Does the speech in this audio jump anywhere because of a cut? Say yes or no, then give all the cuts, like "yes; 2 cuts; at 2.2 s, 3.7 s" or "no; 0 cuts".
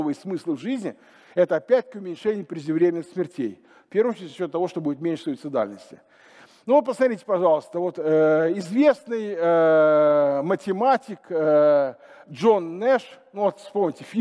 no; 0 cuts